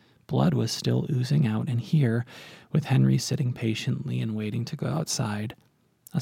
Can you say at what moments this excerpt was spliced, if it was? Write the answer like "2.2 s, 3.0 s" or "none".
none